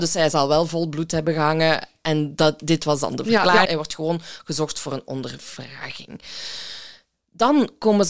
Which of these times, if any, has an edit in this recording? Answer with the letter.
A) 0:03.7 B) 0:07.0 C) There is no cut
A